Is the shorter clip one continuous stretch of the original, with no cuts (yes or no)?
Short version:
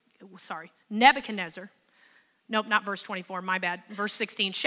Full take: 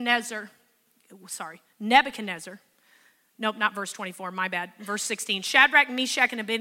yes